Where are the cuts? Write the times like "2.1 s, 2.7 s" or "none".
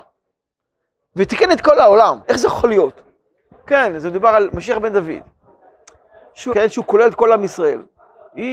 2.2 s, 6.5 s

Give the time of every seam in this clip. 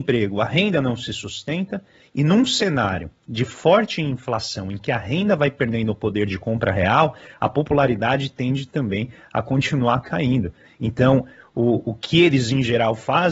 none

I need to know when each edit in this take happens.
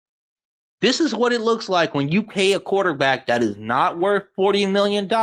none

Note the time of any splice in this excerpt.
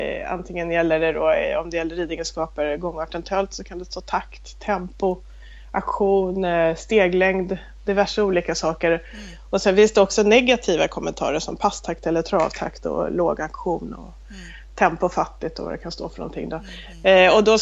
none

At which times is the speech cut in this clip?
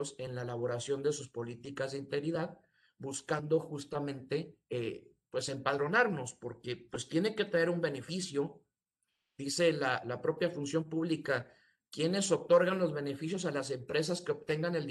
none

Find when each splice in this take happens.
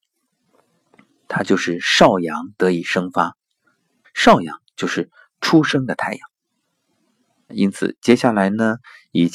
4.0 s, 7.5 s

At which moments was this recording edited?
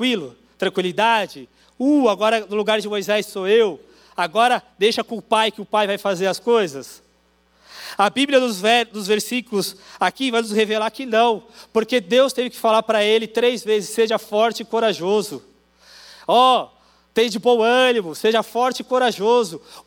none

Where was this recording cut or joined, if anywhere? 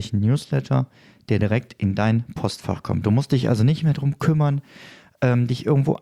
none

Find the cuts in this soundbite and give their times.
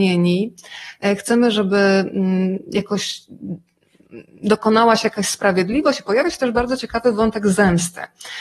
none

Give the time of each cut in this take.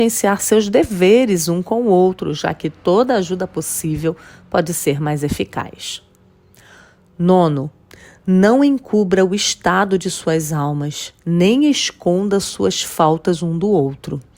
none

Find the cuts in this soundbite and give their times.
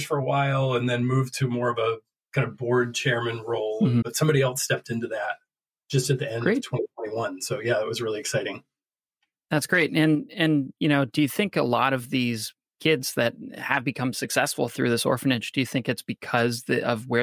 4.0 s

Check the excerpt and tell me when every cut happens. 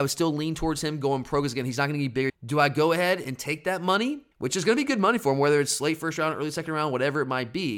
2.3 s, 4.3 s

